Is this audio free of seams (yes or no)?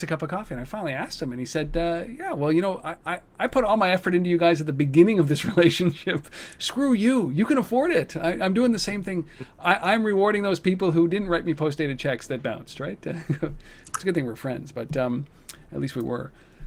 yes